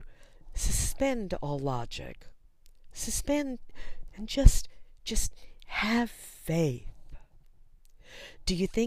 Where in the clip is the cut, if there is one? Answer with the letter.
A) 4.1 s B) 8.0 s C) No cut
A